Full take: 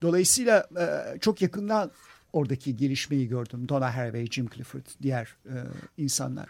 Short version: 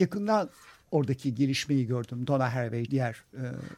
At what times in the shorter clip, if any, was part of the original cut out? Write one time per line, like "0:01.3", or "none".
0:02.8